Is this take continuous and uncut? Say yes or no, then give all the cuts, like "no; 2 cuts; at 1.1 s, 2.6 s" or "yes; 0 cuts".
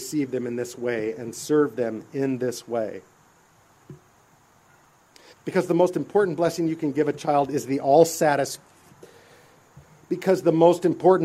no; 1 cut; at 5.3 s